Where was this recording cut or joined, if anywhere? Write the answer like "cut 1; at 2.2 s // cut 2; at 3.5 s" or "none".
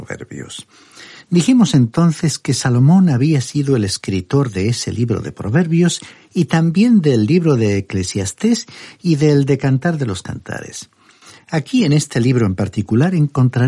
none